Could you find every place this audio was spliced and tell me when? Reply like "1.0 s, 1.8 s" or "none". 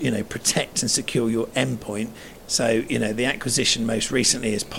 2.4 s